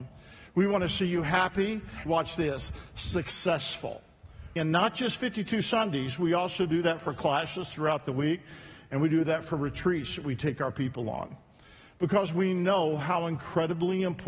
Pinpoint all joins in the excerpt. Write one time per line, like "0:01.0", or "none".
0:02.1
0:04.6